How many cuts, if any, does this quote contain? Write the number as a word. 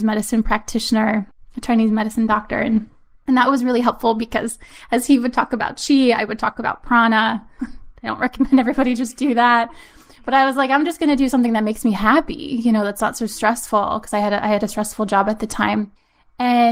one